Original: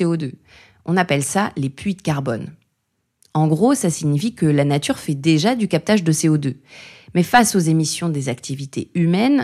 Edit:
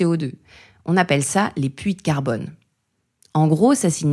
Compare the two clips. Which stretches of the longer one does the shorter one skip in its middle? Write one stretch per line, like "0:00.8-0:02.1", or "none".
none